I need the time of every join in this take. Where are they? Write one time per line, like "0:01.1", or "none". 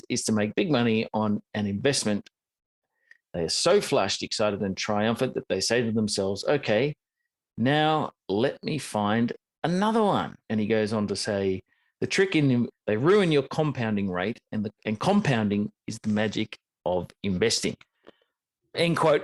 0:10.4
0:12.7
0:14.8